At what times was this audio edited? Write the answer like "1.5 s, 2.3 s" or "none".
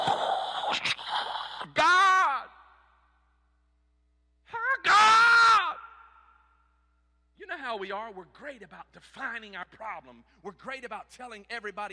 none